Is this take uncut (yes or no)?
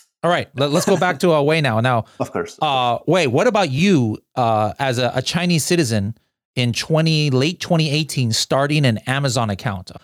yes